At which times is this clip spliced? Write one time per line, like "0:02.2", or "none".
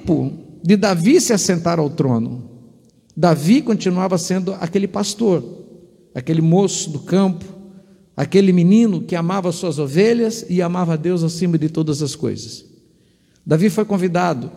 none